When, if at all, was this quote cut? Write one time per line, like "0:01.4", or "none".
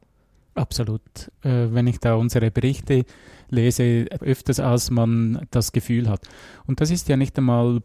0:04.2